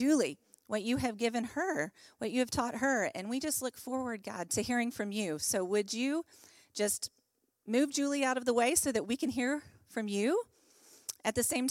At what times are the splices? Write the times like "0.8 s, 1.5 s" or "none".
4.5 s